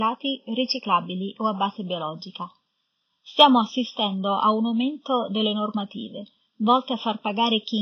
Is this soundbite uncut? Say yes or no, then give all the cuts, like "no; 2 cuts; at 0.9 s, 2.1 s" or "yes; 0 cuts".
yes; 0 cuts